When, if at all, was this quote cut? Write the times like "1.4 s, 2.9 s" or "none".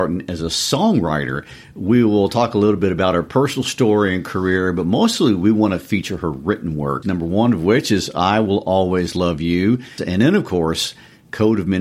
7.0 s, 10.0 s